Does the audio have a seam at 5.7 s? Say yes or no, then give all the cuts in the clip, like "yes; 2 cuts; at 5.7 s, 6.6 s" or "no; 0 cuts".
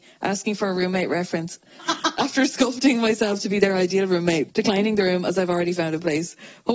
no; 2 cuts; at 1.8 s, 4.5 s